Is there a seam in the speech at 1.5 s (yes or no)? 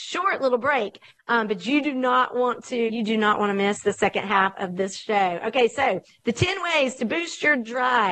no